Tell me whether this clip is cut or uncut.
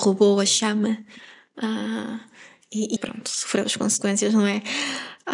cut